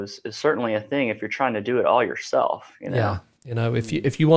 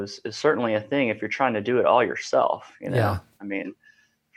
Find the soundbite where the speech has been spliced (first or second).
first